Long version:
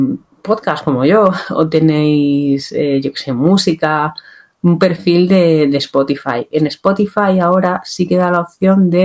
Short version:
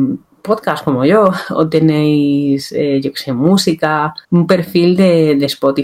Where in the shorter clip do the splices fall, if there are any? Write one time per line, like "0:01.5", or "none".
0:04.2